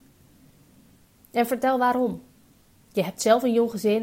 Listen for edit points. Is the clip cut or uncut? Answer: uncut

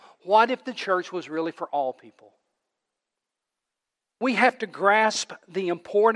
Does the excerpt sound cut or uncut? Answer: uncut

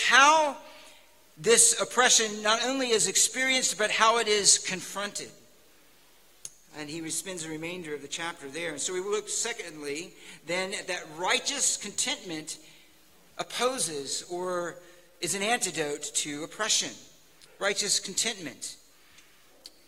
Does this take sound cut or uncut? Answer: uncut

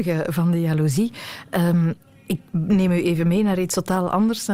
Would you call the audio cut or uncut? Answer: uncut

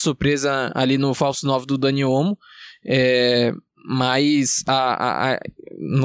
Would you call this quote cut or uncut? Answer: uncut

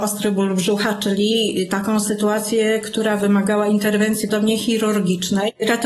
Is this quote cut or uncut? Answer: cut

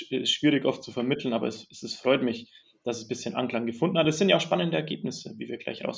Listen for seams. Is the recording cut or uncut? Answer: uncut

